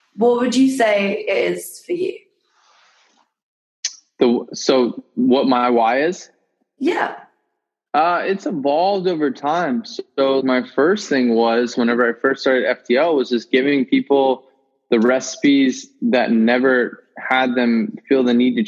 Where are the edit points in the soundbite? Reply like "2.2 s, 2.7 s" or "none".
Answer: 10.4 s